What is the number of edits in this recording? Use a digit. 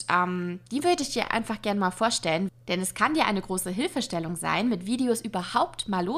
0